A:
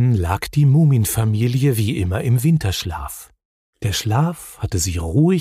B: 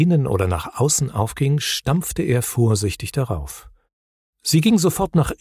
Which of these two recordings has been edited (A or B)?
A